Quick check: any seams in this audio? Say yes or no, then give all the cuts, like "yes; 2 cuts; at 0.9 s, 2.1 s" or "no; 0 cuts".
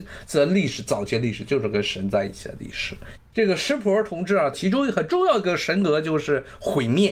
yes; 2 cuts; at 3.2 s, 4.5 s